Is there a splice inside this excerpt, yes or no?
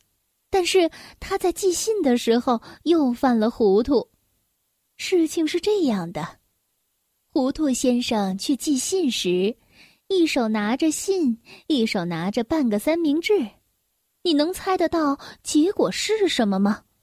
no